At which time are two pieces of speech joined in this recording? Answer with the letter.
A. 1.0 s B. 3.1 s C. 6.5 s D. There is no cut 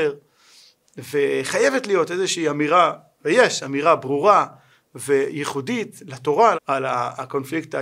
C